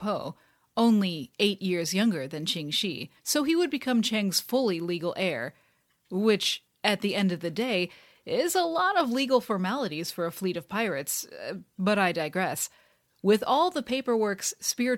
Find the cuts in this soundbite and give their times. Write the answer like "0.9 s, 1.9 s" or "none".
3.2 s